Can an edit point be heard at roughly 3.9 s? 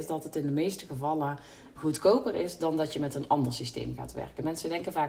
no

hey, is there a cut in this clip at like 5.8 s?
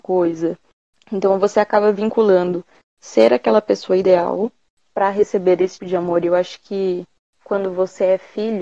yes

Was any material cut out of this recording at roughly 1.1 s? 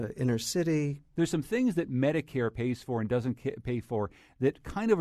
yes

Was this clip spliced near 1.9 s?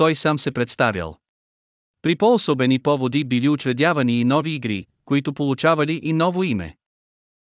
yes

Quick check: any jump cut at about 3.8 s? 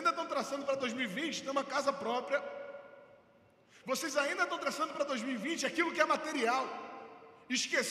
yes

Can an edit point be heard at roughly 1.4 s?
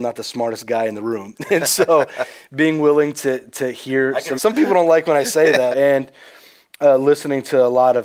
no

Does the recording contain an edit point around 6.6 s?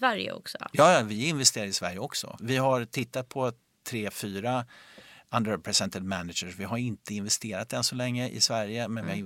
no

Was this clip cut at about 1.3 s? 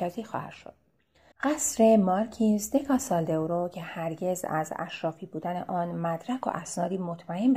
yes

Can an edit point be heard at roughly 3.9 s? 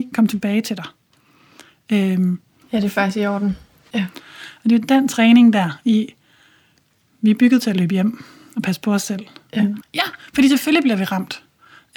yes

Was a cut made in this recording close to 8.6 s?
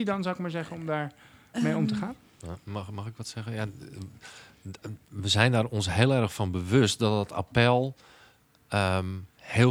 no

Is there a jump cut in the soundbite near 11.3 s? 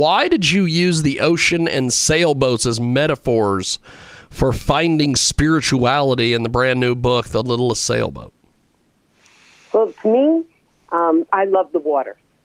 yes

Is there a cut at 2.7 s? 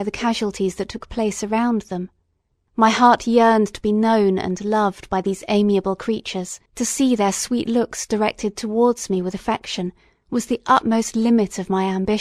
yes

